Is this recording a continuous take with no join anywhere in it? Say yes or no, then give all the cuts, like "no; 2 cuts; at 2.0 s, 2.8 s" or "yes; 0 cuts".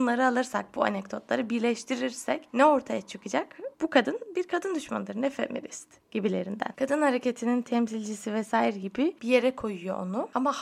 no; 1 cut; at 6.8 s